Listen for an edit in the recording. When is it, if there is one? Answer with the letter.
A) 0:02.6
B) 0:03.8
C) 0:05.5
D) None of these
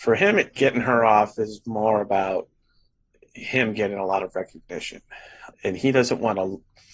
C